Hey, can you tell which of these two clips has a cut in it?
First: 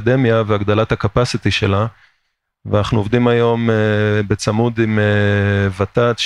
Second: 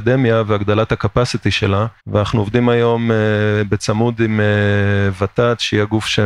second; 1 cut; at 2.0 s

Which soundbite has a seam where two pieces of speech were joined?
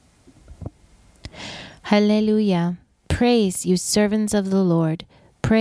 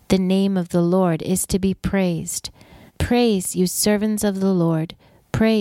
second; 1 cut; at 2.9 s

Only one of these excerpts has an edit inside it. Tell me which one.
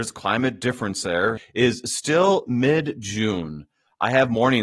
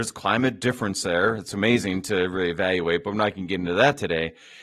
first; 1 cut; at 1.4 s

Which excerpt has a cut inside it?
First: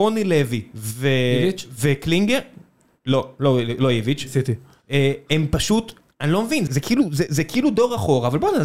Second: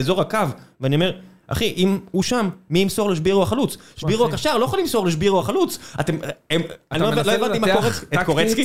first; 1 cut; at 6.7 s

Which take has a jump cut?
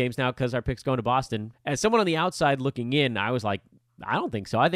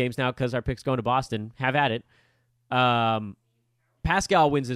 first; 1 cut; at 1.5 s

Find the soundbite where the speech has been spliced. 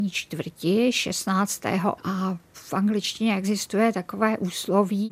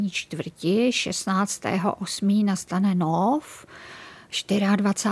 first; 1 cut; at 2.0 s

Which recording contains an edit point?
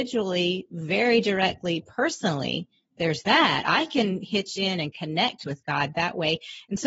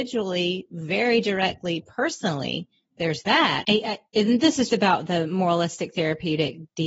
second; 2 cuts; at 3.6 s, 4.7 s

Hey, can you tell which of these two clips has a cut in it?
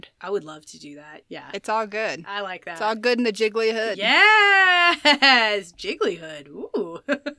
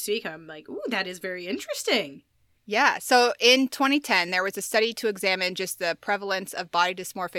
first; 1 cut; at 1.2 s

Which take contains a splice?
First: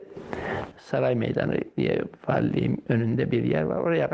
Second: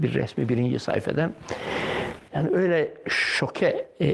second; 1 cut; at 2.3 s

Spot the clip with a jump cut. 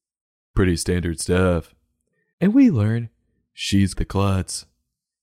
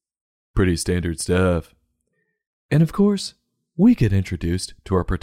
first; 2 cuts; at 2.3 s, 3.9 s

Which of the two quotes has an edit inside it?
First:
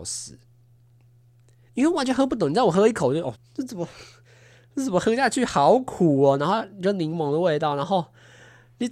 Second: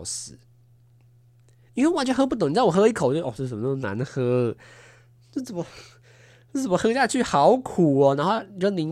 first; 1 cut; at 3.3 s

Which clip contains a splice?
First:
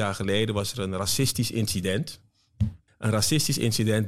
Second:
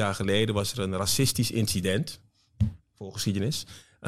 first; 1 cut; at 2.9 s

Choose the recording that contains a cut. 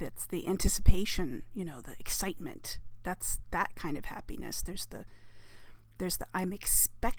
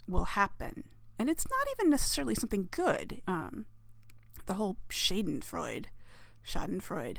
second; 1 cut; at 3.2 s

